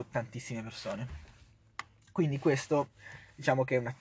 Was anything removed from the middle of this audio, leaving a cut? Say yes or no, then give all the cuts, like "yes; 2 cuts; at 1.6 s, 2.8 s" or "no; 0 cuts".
no; 0 cuts